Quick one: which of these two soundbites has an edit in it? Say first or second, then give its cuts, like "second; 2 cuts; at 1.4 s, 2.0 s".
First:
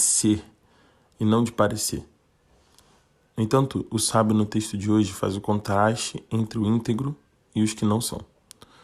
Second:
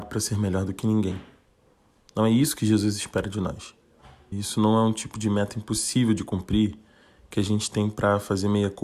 second; 1 cut; at 4.3 s